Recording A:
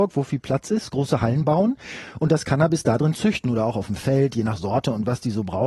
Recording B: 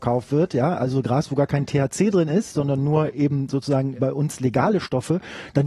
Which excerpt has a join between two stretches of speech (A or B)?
B